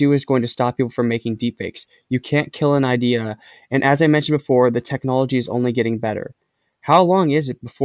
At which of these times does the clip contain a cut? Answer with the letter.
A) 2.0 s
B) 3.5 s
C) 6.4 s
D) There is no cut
D